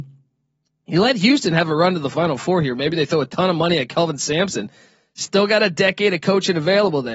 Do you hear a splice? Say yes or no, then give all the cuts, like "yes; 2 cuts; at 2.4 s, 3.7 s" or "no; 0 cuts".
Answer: no; 0 cuts